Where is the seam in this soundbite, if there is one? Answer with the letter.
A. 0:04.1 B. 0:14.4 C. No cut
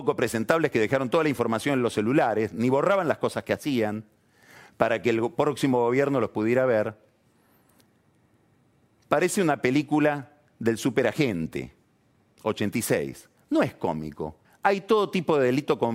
B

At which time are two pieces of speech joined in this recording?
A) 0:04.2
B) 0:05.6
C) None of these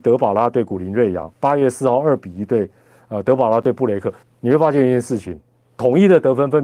A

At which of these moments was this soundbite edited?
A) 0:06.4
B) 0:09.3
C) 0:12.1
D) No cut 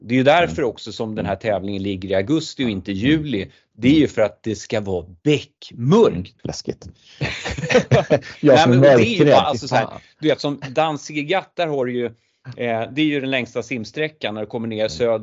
A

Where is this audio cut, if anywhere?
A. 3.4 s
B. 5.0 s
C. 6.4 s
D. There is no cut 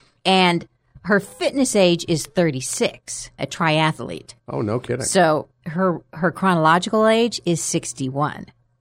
A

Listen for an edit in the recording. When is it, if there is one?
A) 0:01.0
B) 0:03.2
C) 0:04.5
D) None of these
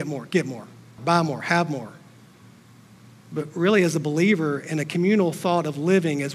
A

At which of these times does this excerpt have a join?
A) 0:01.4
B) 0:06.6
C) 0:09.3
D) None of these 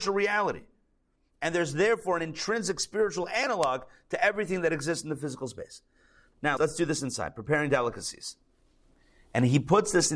B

